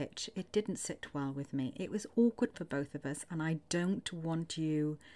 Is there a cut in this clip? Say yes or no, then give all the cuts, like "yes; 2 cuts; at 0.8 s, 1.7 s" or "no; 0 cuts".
no; 0 cuts